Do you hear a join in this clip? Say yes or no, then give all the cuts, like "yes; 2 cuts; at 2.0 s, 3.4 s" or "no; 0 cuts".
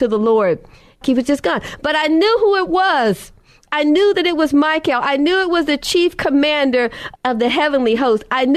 yes; 1 cut; at 1.0 s